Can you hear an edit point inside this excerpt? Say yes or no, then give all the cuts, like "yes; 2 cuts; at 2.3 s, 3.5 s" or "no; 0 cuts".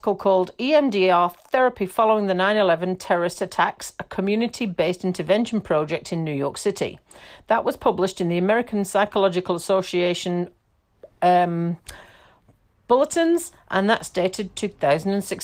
no; 0 cuts